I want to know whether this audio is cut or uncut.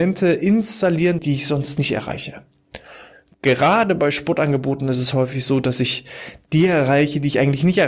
cut